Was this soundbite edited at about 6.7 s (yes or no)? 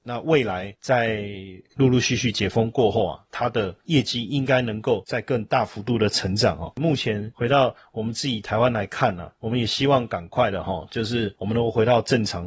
no